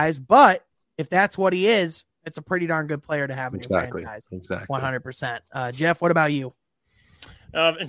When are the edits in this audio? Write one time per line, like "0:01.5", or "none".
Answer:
none